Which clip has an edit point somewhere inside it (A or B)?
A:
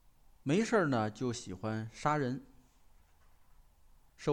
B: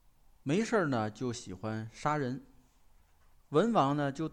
B